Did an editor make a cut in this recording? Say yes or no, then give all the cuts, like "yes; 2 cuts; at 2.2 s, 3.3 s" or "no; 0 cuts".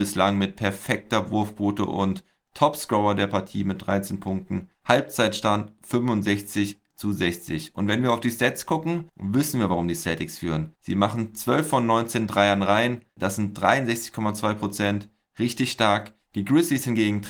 no; 0 cuts